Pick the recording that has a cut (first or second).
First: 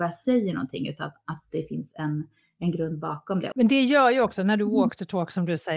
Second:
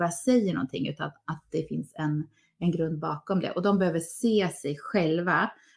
first